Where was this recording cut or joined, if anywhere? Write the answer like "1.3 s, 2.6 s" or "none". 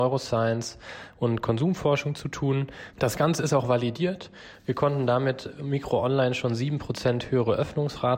2.9 s